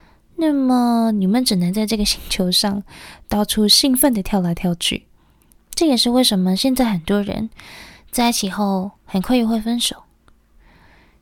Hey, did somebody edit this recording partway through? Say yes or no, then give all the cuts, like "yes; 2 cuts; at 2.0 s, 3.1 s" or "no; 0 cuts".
yes; 1 cut; at 5.5 s